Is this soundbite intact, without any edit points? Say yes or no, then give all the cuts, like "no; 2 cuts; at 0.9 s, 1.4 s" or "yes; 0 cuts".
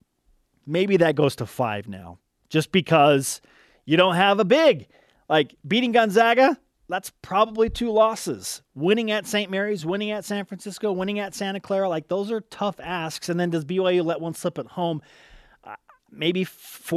yes; 0 cuts